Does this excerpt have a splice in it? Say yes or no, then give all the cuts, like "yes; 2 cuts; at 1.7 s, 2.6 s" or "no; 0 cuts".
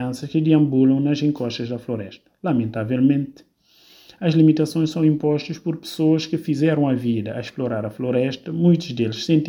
no; 0 cuts